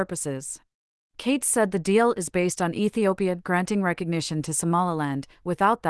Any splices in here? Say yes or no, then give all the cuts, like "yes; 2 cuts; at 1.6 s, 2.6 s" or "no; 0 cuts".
yes; 1 cut; at 1.0 s